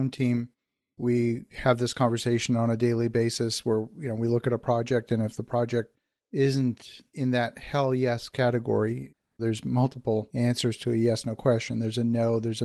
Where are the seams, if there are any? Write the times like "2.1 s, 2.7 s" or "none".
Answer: none

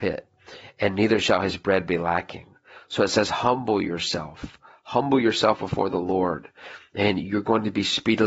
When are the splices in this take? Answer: none

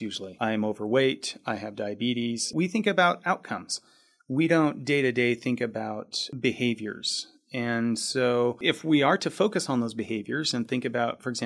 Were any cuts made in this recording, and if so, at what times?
none

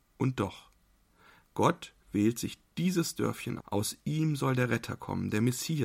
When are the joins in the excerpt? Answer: 3.6 s

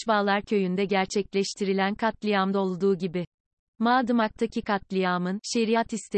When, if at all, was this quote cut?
3.6 s

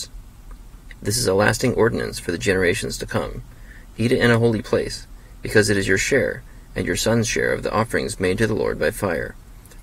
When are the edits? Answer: 1.0 s, 3.9 s

